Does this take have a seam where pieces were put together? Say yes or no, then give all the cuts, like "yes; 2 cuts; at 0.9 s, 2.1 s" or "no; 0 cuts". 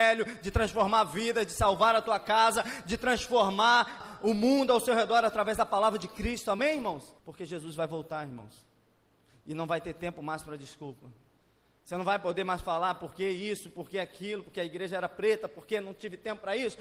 yes; 2 cuts; at 4.0 s, 7.2 s